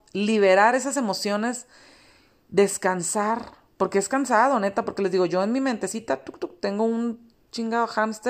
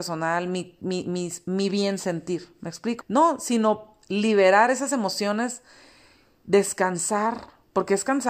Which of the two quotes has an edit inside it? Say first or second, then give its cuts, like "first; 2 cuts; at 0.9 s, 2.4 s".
second; 1 cut; at 3.0 s